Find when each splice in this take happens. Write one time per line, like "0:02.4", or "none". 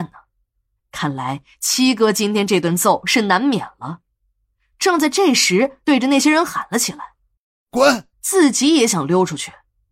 0:05.8
0:08.1